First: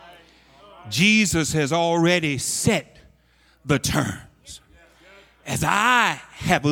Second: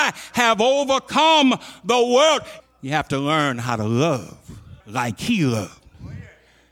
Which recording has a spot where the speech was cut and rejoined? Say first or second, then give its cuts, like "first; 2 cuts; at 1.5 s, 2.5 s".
second; 2 cuts; at 2.6 s, 4.8 s